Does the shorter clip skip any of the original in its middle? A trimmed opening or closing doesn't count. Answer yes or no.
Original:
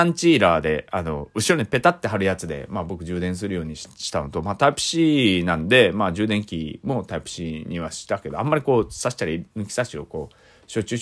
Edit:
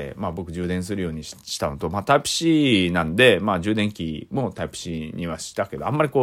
no